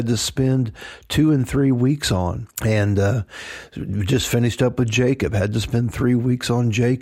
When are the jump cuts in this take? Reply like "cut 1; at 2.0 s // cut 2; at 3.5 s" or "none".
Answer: cut 1; at 2.5 s